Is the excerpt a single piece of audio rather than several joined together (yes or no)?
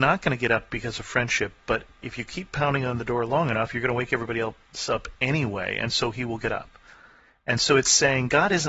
yes